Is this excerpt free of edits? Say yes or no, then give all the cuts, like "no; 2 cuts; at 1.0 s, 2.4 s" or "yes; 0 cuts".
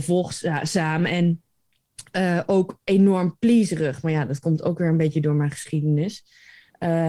yes; 0 cuts